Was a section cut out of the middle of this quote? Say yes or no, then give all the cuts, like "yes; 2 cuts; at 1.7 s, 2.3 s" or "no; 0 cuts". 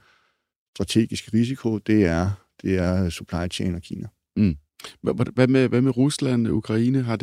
no; 0 cuts